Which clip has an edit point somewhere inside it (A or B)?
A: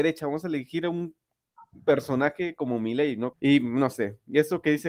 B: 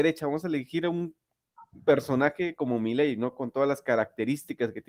A